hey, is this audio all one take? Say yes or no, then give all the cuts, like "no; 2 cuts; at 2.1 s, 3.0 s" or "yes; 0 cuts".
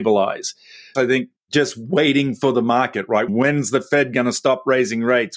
no; 2 cuts; at 0.9 s, 3.3 s